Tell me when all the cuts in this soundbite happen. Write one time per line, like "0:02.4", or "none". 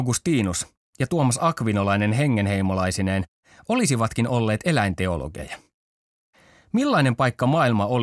none